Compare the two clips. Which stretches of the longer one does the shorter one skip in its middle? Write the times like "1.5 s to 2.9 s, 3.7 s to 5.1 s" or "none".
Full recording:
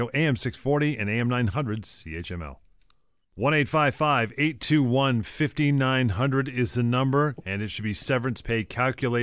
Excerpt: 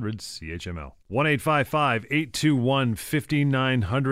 2.7 s to 3.3 s

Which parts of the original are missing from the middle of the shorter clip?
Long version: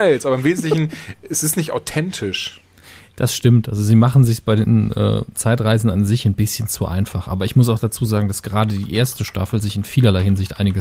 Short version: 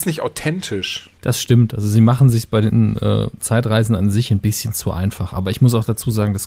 2.7 s to 3.1 s

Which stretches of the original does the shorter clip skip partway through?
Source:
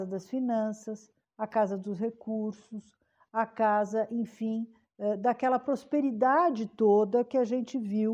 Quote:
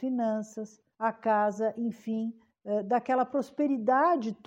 1.2 s to 3.3 s

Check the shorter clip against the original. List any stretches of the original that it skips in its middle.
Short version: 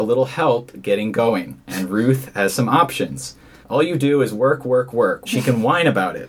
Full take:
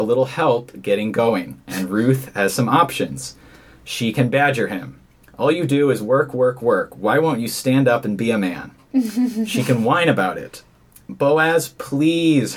3.6 s to 5.3 s, 6.9 s to 9.5 s

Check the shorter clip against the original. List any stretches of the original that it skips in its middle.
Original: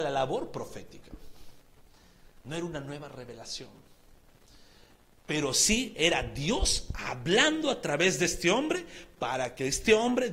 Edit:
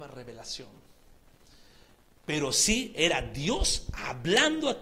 none

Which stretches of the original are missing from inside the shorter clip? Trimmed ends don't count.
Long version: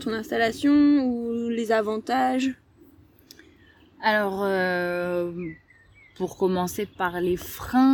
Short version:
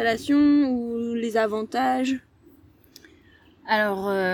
none

